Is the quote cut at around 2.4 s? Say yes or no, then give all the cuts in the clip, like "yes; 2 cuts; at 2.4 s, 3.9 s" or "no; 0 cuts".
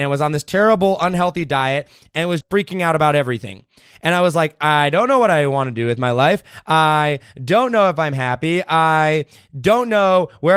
yes; 1 cut; at 2.4 s